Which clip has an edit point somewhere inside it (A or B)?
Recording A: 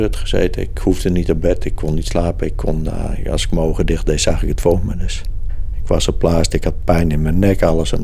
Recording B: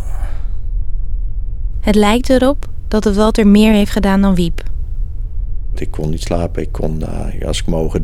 B